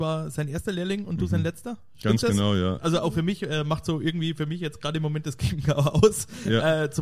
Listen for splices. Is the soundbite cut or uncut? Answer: cut